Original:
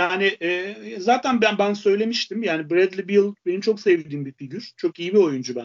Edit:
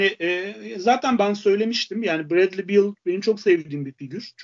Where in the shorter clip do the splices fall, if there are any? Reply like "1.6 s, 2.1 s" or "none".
1.2 s